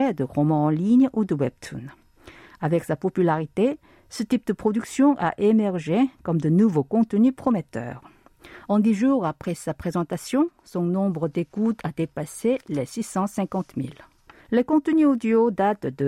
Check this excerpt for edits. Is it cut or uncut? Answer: cut